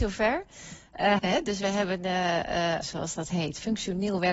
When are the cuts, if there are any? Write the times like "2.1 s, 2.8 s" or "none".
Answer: 1.2 s, 2.8 s